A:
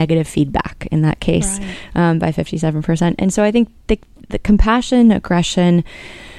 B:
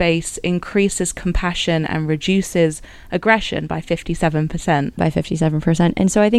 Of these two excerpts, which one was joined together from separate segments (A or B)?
B